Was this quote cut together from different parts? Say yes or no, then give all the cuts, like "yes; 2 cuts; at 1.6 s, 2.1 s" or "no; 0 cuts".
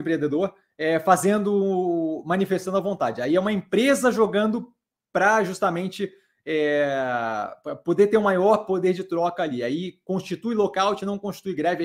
no; 0 cuts